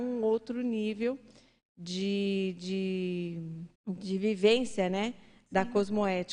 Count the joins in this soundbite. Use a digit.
1